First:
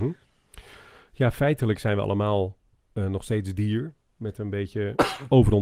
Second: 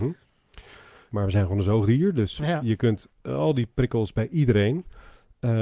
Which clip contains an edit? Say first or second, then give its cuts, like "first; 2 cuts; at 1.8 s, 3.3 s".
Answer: second; 1 cut; at 1.1 s